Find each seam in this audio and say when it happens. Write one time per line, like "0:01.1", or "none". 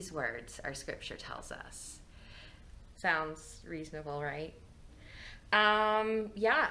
0:02.9